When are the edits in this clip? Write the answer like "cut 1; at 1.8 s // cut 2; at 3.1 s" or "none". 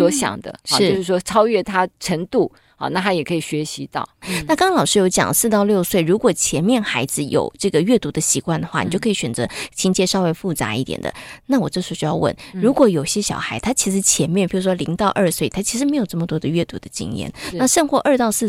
none